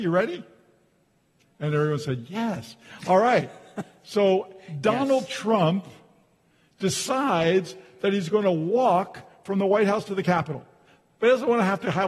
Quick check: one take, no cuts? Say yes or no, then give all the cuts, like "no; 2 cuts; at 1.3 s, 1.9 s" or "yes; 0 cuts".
yes; 0 cuts